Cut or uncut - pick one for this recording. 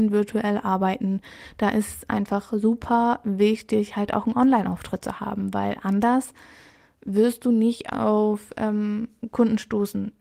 uncut